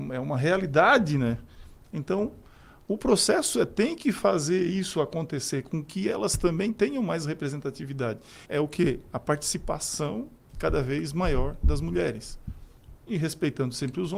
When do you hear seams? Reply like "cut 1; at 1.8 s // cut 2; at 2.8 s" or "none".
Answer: cut 1; at 1.8 s // cut 2; at 8.5 s